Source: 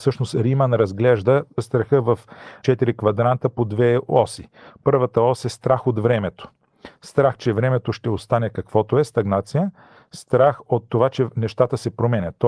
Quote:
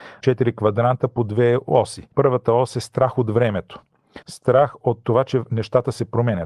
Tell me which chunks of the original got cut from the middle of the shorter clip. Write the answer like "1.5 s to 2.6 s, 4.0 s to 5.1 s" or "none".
4.5 s to 4.8 s, 6.9 s to 10.1 s